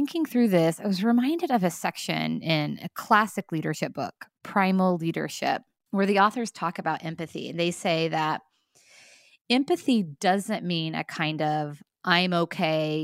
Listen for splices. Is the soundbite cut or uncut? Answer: uncut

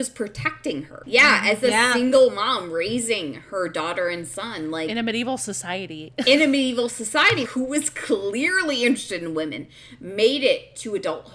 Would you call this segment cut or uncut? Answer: cut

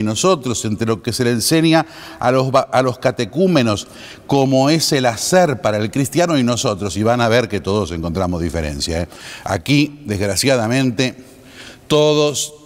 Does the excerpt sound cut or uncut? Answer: uncut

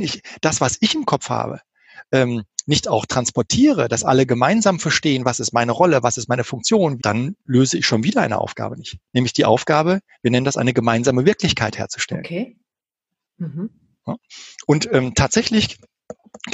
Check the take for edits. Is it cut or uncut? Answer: cut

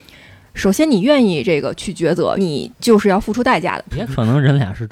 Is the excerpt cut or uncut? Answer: cut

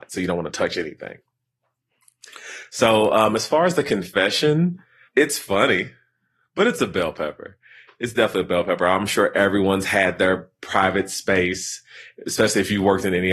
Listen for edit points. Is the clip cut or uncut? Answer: uncut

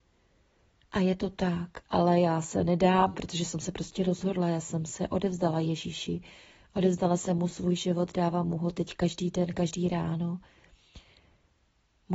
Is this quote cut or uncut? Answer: cut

